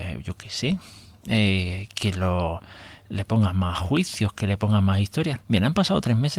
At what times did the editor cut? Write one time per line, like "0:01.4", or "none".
0:05.4